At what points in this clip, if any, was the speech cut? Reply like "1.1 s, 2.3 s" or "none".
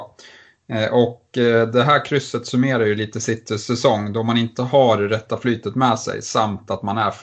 none